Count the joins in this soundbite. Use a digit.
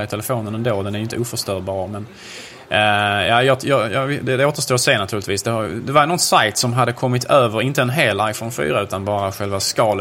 0